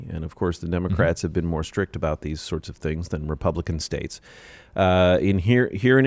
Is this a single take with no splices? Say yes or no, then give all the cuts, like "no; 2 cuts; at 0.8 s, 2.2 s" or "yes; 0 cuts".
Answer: yes; 0 cuts